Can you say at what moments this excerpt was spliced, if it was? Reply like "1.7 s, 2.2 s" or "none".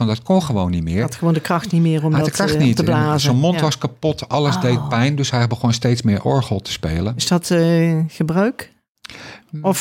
none